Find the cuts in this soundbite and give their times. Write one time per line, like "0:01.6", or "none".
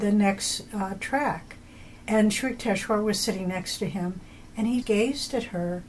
0:02.0
0:04.8